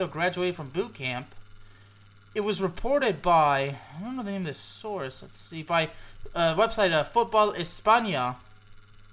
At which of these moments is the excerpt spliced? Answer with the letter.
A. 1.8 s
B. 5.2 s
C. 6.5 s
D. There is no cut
D